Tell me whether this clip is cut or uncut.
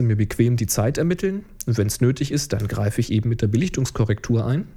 uncut